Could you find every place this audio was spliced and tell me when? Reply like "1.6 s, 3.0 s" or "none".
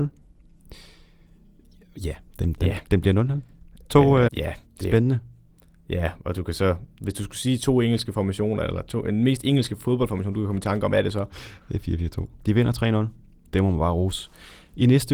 4.3 s, 12.4 s